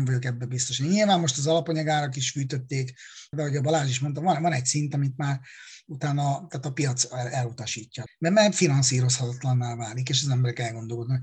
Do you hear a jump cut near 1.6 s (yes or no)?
no